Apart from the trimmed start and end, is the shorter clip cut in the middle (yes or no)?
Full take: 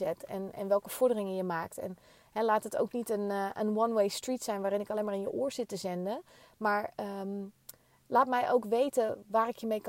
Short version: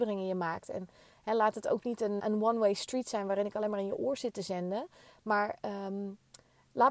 yes